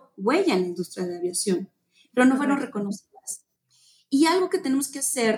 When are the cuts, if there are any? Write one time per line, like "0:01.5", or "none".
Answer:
none